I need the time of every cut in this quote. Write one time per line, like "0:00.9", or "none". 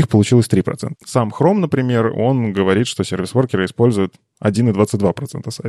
0:01.0